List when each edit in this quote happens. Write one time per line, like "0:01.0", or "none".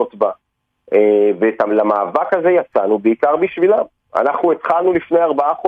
none